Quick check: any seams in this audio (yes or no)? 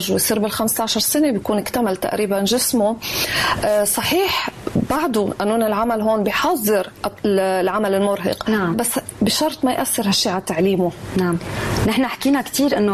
yes